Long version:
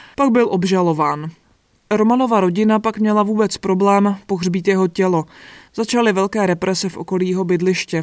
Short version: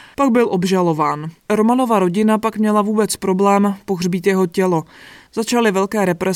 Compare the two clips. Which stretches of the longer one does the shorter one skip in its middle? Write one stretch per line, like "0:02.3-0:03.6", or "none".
0:01.4-0:01.8